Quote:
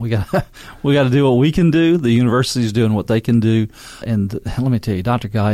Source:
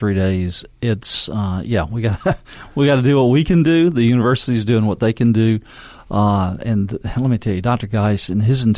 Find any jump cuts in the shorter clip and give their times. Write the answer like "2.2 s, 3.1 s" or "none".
4.0 s